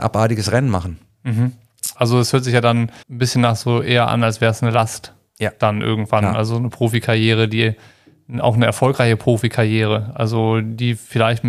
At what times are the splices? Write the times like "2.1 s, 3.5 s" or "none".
1.9 s, 3.0 s